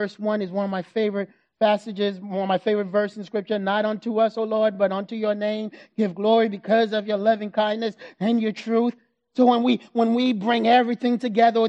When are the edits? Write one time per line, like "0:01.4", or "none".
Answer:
none

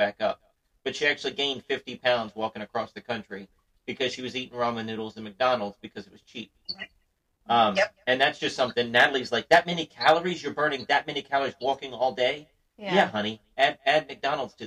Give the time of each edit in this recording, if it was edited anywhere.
none

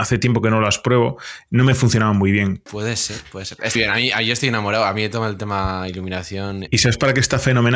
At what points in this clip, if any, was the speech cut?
0:02.7
0:03.8
0:06.7

